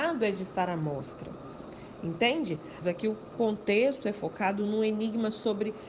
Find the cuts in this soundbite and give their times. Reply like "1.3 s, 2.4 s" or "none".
2.8 s

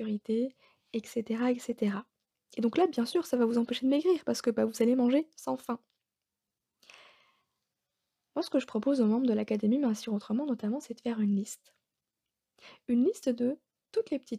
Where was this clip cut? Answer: none

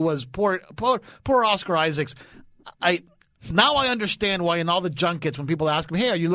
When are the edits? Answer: none

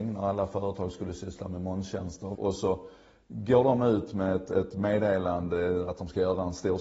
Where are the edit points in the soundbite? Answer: 2.3 s

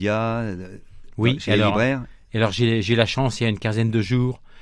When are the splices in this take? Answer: none

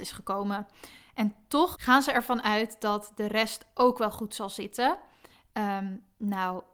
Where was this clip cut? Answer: 1.7 s

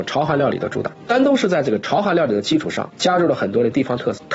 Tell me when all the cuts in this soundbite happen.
none

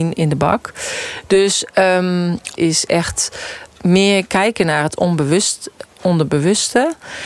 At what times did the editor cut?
2.6 s

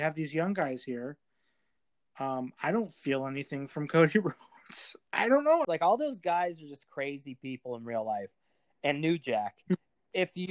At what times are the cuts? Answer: 5.6 s

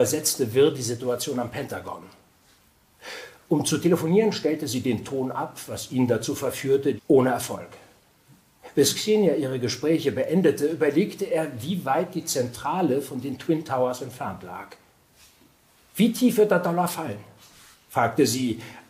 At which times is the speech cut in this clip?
7.0 s, 15.8 s

